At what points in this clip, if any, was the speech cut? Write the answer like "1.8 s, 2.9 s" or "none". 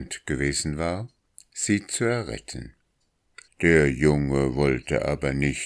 3.5 s